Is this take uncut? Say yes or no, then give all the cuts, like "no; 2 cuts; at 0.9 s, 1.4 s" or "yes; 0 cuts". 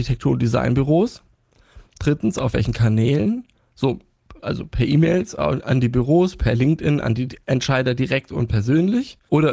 no; 1 cut; at 4.4 s